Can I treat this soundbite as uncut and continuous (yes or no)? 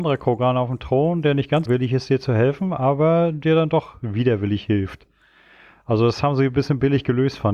no